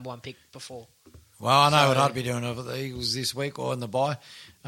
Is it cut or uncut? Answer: uncut